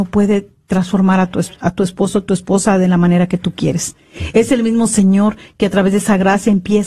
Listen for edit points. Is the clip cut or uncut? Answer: uncut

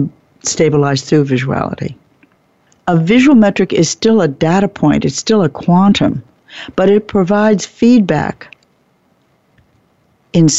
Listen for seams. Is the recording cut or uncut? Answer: uncut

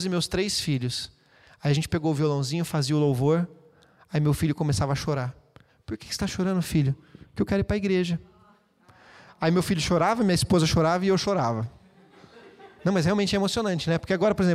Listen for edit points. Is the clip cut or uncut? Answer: uncut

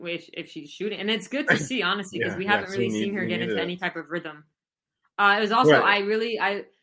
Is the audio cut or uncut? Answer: uncut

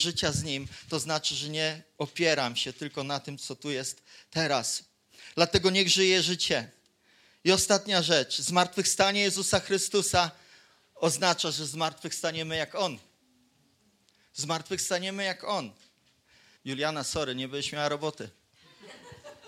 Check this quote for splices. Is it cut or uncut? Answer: cut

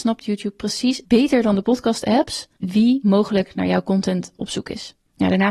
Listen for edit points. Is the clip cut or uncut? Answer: cut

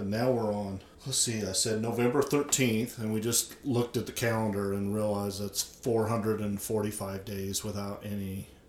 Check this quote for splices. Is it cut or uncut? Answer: cut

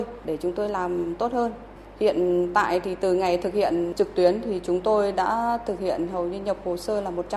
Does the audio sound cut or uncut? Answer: uncut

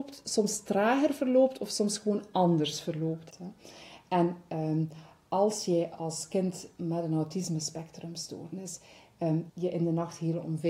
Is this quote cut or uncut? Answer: cut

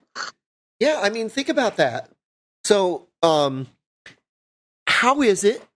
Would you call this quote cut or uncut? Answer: uncut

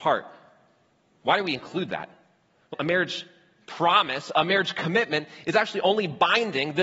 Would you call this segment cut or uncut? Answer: cut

